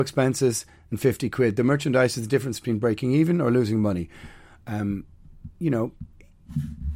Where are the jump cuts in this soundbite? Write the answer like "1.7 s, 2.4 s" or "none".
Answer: none